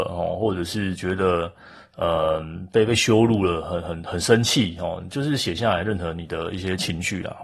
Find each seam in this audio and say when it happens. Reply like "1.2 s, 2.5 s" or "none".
none